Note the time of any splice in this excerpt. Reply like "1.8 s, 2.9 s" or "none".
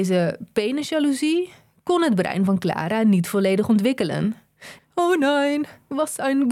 4.8 s

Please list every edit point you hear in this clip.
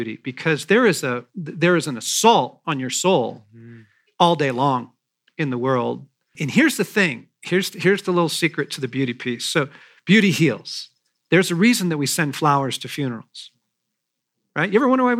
6.4 s

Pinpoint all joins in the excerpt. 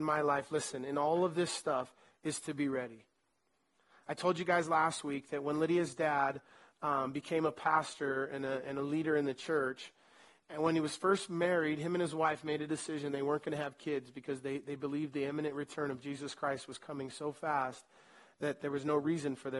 none

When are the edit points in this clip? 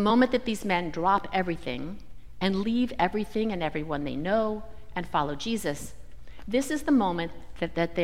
none

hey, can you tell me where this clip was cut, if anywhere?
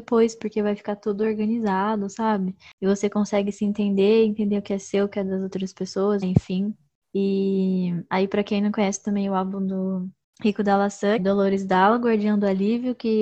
6.2 s, 11.2 s

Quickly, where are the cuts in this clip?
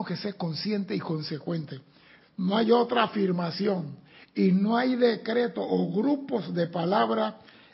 2.2 s

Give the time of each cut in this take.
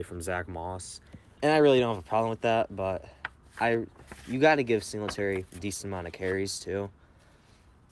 1.4 s

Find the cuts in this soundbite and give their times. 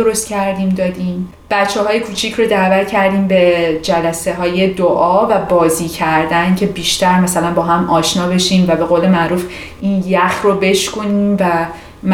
none

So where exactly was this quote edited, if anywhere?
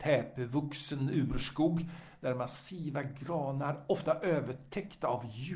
none

